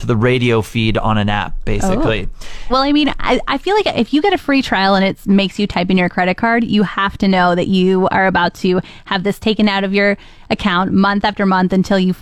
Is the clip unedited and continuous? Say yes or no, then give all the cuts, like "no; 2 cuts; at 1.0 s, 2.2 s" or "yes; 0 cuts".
no; 1 cut; at 2.7 s